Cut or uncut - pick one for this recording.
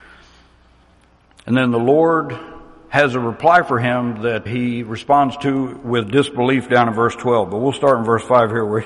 cut